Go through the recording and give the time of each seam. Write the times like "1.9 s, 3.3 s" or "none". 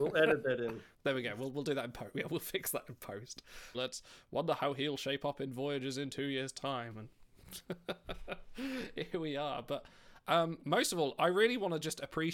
3.7 s